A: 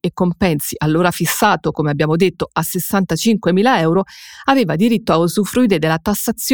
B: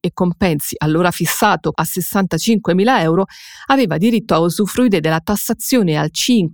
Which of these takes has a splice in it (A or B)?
B